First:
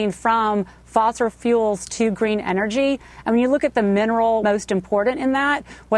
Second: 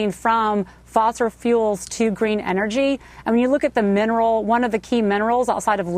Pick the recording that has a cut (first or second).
first